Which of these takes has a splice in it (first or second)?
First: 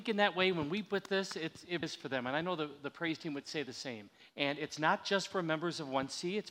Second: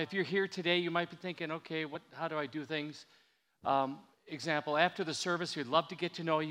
first